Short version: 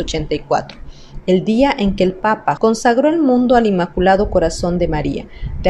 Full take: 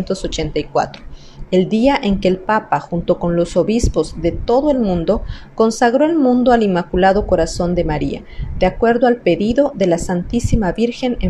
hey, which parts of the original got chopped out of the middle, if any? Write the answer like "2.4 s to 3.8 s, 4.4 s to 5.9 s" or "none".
2.8 s to 5.5 s